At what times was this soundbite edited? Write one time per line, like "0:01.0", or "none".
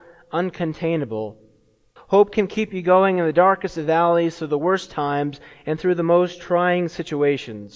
0:02.0